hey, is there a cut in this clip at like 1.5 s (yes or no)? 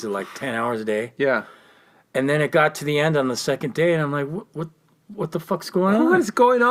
no